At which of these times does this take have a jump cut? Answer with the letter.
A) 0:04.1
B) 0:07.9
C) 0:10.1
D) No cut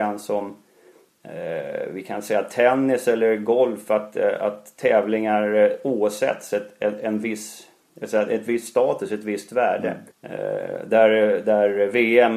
C